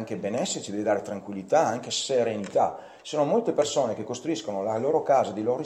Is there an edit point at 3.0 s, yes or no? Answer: no